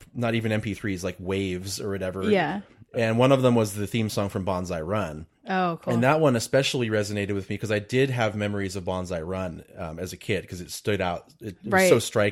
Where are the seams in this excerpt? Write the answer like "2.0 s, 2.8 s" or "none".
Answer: none